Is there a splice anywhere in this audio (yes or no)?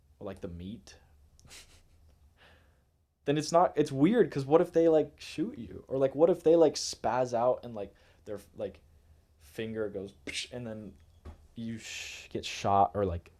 no